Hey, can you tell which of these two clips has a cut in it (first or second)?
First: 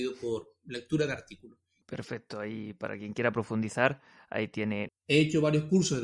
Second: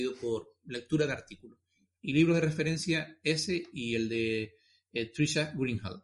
first